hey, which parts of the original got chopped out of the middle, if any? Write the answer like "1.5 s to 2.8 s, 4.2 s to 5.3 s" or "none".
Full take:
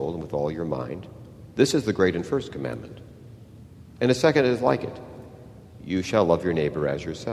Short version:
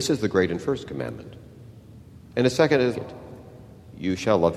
4.6 s to 4.8 s